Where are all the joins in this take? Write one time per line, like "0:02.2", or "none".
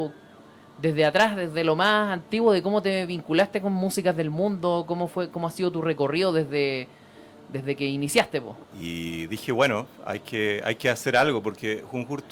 0:08.6